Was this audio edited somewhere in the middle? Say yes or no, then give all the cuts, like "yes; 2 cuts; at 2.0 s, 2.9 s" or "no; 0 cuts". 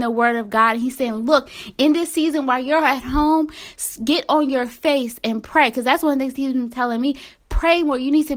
no; 0 cuts